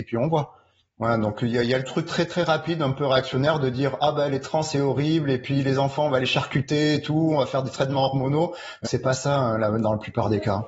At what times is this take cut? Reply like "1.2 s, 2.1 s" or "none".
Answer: 8.8 s